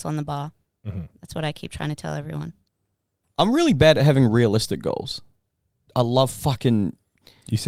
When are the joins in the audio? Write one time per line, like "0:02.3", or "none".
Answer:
0:03.2
0:05.9